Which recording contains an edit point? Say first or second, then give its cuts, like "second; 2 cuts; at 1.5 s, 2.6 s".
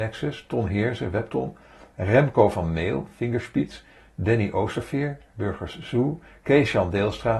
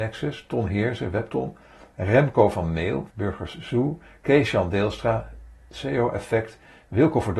second; 1 cut; at 3.1 s